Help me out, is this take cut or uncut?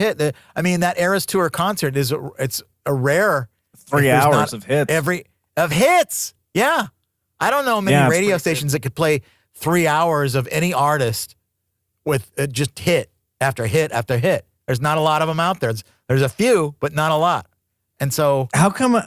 uncut